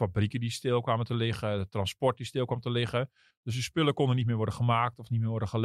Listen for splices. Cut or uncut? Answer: uncut